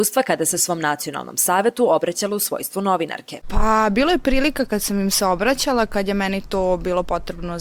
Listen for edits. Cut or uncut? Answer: cut